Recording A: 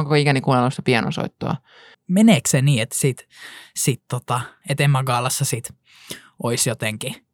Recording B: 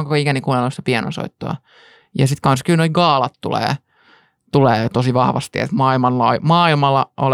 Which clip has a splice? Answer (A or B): A